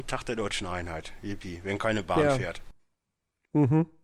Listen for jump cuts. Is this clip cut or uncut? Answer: uncut